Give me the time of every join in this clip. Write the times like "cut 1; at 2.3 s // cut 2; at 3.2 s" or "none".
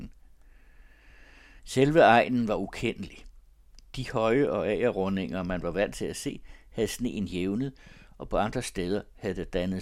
none